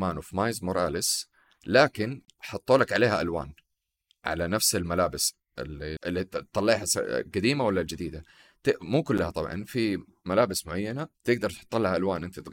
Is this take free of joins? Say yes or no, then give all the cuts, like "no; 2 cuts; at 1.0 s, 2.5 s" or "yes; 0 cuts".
no; 2 cuts; at 6.0 s, 11.1 s